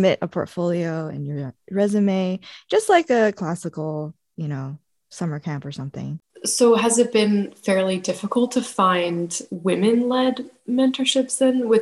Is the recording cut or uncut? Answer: cut